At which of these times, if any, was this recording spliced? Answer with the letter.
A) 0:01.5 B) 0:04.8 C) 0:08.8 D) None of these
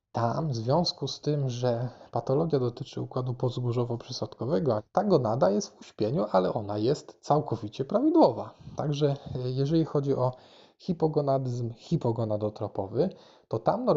B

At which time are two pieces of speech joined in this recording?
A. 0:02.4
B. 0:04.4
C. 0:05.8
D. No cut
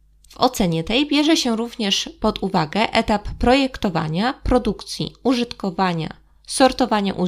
D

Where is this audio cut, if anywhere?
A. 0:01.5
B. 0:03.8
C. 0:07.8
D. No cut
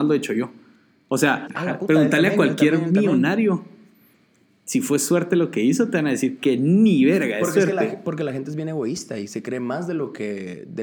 A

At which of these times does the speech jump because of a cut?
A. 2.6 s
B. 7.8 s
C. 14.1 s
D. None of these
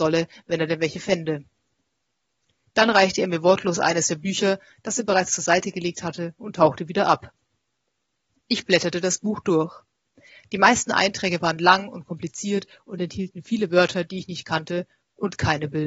A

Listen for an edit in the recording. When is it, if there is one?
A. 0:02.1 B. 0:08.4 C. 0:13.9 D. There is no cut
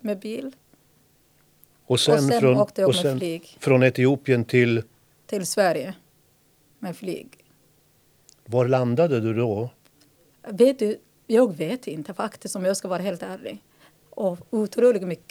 C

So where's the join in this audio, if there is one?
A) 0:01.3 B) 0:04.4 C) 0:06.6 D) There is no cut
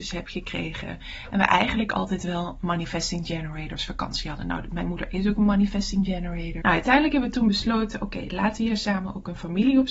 C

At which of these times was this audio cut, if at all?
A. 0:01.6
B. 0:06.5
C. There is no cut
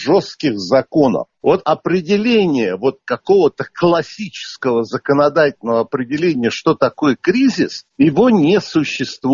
A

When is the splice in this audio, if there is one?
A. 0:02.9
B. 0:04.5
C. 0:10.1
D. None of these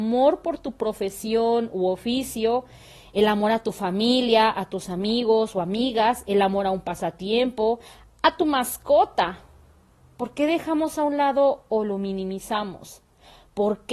D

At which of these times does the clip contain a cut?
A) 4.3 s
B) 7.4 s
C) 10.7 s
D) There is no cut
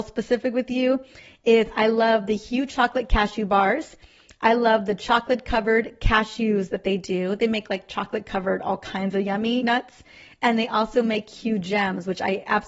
D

